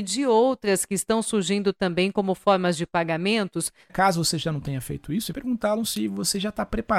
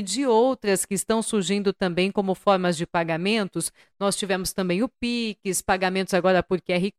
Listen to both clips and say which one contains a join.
first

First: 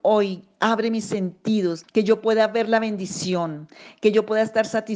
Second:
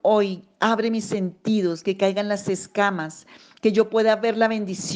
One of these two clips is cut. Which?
first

